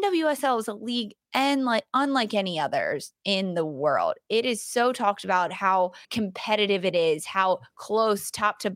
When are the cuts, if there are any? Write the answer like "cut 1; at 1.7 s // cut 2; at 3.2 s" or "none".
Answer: cut 1; at 6.0 s

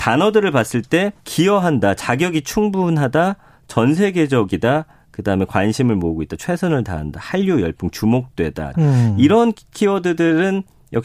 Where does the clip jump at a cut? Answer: cut 1; at 1.2 s // cut 2; at 8.7 s

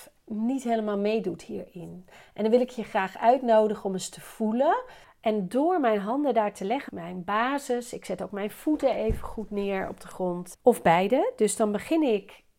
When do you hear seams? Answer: cut 1; at 5.0 s // cut 2; at 6.9 s // cut 3; at 10.5 s

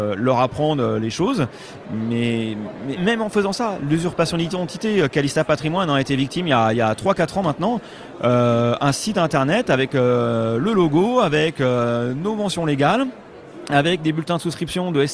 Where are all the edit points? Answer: cut 1; at 1.8 s // cut 2; at 3.0 s

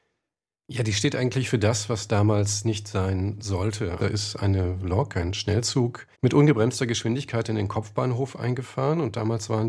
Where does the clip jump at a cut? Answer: cut 1; at 4.0 s // cut 2; at 6.1 s

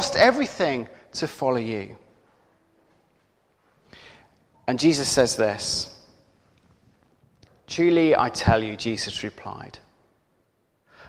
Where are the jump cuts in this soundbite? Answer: none

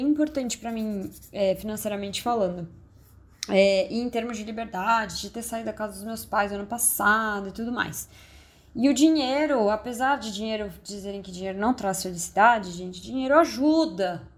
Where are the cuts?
none

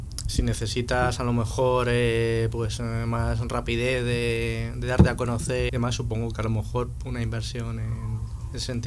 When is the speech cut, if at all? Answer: cut 1; at 5.7 s

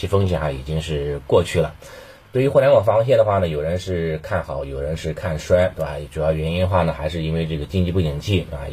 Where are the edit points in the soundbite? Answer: none

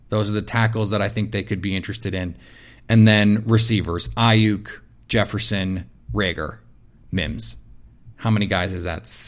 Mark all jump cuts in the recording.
cut 1; at 8.1 s

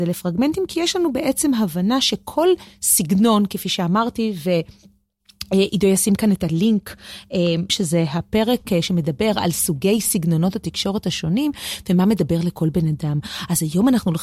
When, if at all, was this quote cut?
cut 1; at 7.7 s

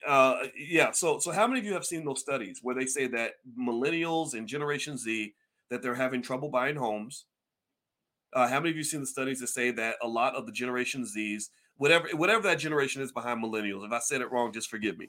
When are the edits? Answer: none

